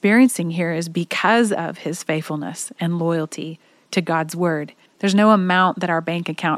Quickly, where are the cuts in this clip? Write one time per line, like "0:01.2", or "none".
0:04.9

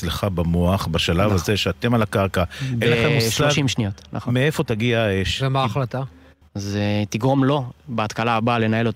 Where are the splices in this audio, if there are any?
0:06.4

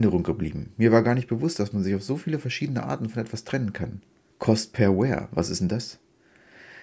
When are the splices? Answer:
0:04.3

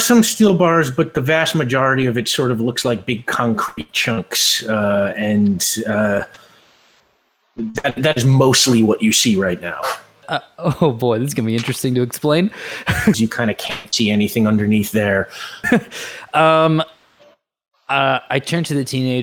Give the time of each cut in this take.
0:10.2
0:13.1
0:15.6

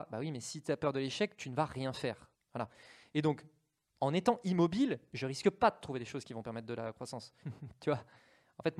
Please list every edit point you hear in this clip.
0:02.3
0:07.4

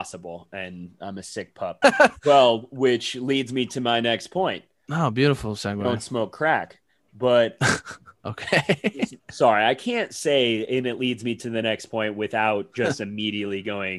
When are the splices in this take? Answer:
0:01.8

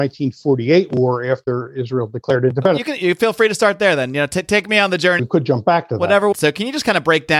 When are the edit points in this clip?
0:05.2
0:06.3

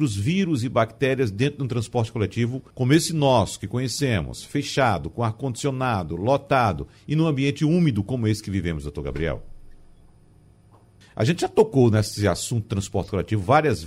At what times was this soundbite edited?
0:02.7
0:11.0

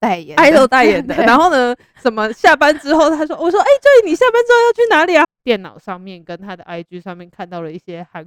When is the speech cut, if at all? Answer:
0:05.2

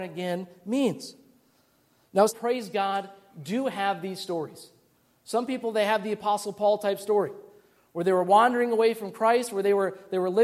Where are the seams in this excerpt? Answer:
0:02.3

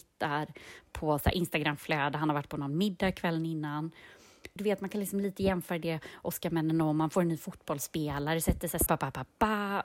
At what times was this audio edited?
0:04.6
0:08.9

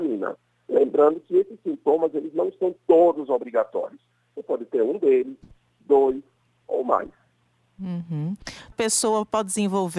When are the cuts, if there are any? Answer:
0:08.7

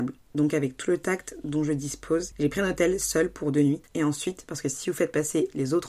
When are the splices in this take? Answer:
0:02.3
0:03.9

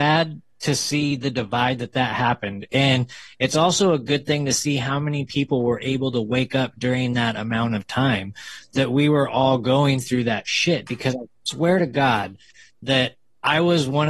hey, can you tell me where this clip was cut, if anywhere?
none

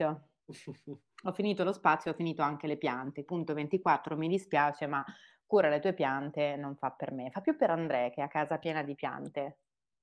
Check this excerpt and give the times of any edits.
0:03.3

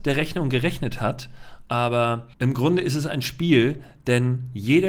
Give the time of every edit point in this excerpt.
0:02.3

